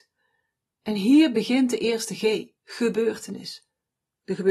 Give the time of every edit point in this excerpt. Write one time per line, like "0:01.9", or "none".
0:02.6